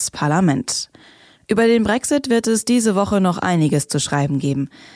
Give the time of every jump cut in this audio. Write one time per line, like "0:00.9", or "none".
none